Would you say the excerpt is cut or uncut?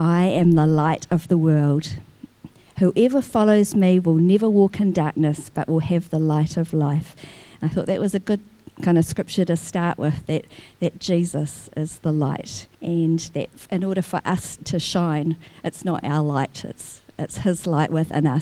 cut